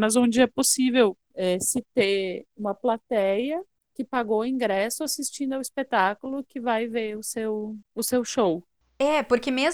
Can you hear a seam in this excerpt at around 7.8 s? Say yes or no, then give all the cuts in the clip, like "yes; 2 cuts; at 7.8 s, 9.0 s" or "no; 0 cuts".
yes; 2 cuts; at 1.2 s, 7.8 s